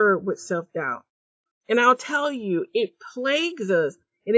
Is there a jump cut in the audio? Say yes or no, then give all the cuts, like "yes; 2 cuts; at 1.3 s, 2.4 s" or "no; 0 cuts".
no; 0 cuts